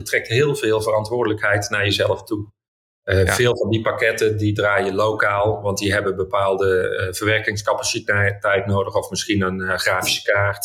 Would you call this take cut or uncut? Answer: cut